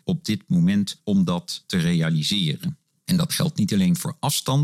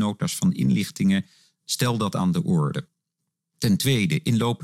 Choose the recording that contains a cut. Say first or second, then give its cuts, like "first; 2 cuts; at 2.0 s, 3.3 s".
first; 1 cut; at 3.0 s